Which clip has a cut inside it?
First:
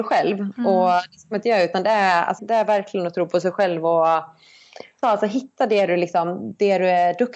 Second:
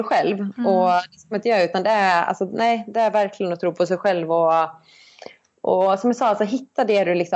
first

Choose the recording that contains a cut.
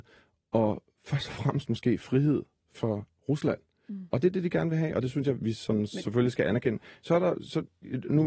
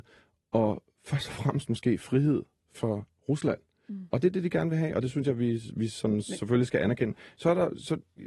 first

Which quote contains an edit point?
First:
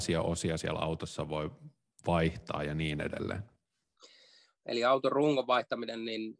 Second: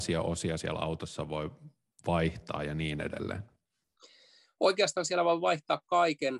first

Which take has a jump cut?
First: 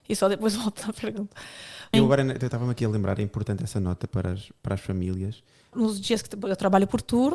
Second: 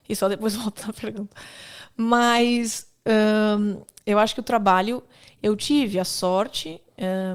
first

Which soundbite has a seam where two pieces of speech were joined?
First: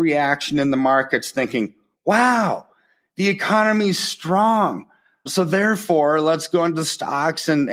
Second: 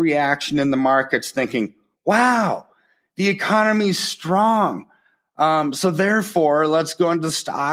first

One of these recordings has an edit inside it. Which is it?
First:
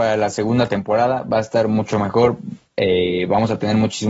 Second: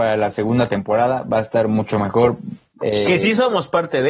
second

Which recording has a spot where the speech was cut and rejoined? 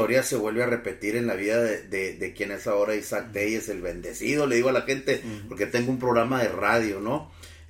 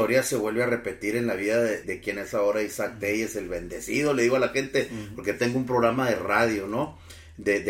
second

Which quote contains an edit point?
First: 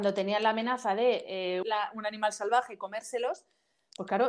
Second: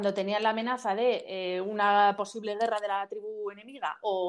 first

